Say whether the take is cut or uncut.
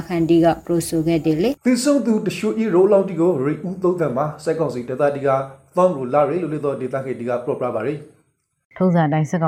cut